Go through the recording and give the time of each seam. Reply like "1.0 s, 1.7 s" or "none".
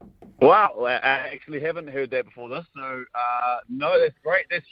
none